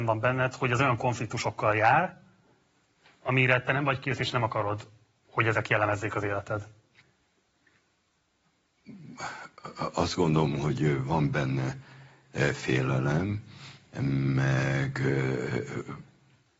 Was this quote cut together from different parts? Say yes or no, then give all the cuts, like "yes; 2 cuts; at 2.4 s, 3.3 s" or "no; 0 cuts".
no; 0 cuts